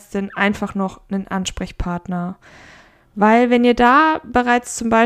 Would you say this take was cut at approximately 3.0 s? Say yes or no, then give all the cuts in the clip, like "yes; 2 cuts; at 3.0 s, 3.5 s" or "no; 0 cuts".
yes; 1 cut; at 3.0 s